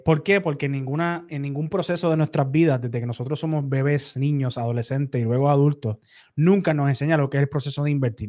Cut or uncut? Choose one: cut